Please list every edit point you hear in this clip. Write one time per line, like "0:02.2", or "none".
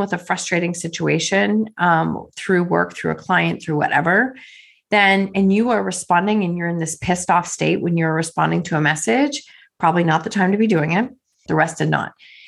0:11.5